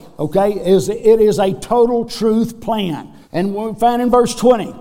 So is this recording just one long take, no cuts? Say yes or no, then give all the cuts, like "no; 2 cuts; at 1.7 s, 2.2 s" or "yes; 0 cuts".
no; 1 cut; at 3.2 s